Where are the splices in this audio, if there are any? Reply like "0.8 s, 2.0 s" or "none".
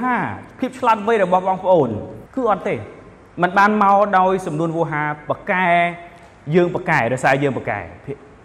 2.3 s

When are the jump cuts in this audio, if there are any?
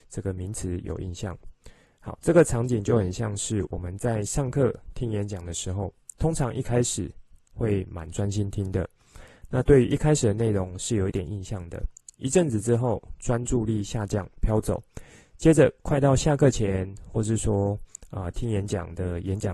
none

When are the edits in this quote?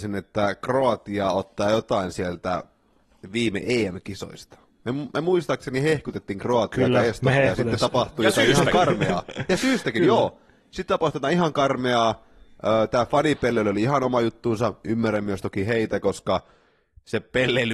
none

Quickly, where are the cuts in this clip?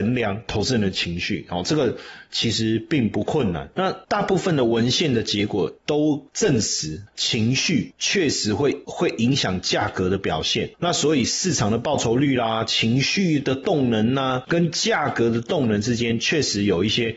none

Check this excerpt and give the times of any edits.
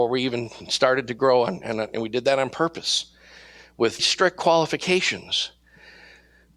4.0 s

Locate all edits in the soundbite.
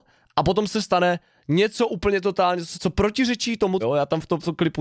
2.7 s, 3.8 s

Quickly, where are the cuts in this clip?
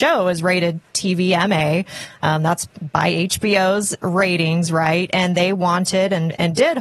none

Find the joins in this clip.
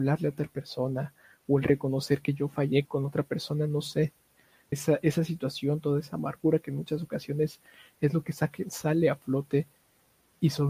2.8 s, 4.7 s

